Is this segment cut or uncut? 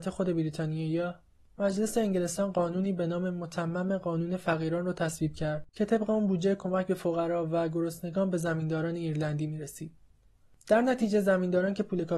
cut